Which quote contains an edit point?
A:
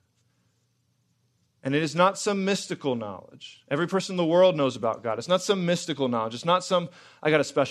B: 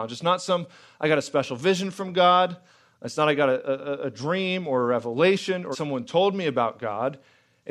B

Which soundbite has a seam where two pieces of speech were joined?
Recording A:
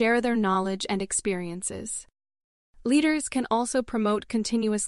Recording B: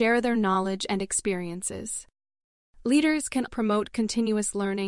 B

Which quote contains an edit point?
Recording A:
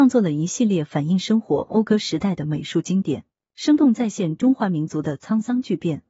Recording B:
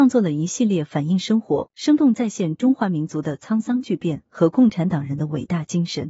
B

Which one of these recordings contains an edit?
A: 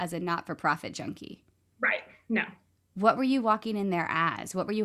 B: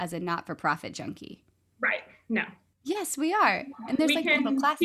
B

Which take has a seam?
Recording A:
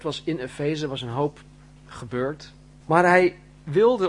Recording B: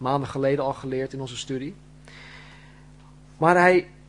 A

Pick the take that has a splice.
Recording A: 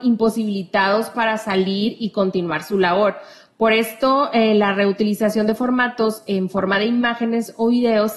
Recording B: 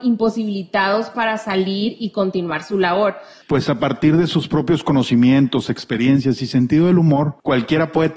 B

